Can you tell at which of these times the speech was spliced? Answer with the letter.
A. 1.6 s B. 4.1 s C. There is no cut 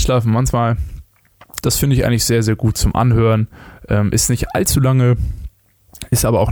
A